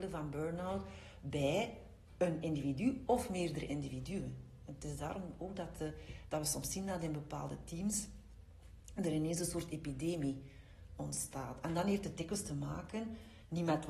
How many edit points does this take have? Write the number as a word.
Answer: zero